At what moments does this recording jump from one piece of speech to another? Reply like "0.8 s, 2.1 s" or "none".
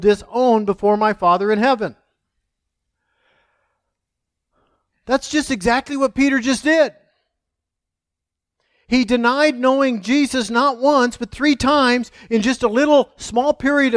none